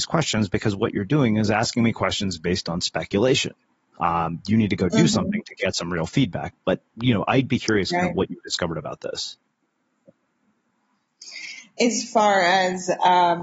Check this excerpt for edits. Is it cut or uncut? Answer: uncut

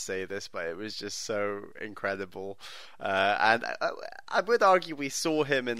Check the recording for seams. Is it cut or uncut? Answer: uncut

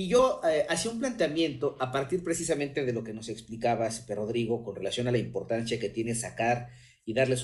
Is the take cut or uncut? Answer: uncut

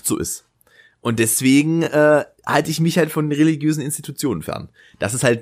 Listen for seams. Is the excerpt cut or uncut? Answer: uncut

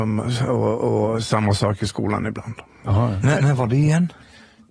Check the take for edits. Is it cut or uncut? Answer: uncut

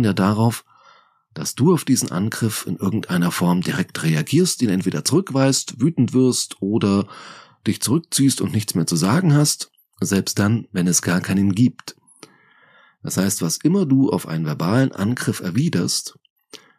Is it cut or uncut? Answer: cut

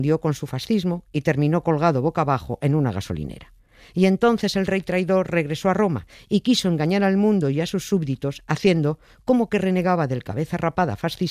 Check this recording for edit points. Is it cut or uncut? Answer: uncut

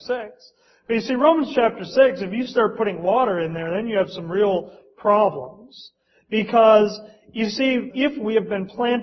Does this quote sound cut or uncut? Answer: cut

